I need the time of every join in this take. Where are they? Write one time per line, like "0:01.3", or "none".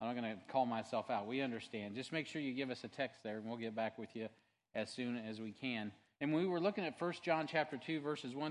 0:06.1